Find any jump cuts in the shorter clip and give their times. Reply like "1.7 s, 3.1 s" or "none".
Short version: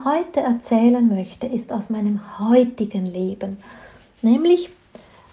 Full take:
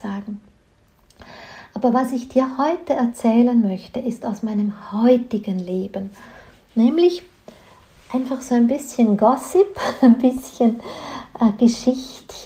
none